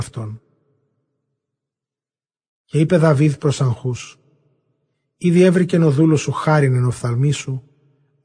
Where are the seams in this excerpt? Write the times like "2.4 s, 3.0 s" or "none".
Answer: none